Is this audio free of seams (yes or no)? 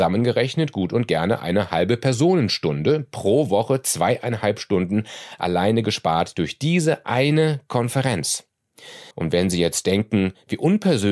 no